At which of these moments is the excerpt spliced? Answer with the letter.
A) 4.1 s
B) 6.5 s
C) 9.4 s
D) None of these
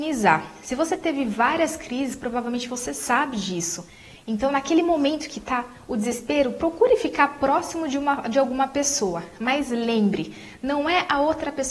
D